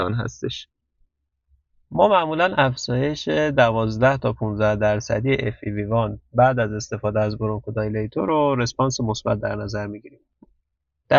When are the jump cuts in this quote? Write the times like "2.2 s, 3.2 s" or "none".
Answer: none